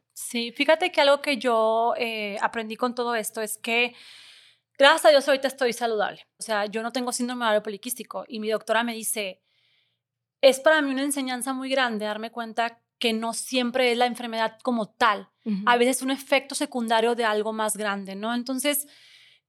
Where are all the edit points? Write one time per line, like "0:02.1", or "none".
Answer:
0:06.4